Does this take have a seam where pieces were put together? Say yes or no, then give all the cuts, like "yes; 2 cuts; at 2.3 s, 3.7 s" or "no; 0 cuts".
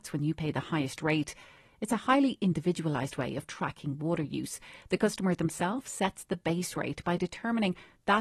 no; 0 cuts